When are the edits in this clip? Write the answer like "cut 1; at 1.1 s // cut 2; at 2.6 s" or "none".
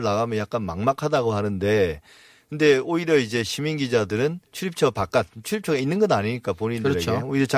cut 1; at 4.5 s